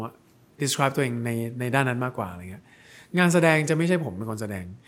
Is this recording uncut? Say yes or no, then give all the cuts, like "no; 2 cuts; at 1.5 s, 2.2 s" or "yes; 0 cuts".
yes; 0 cuts